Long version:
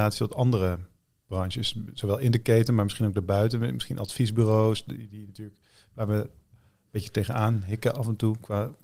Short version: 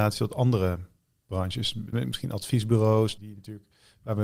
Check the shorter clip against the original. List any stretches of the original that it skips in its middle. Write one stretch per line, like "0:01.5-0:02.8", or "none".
0:01.9-0:03.6
0:04.8-0:05.1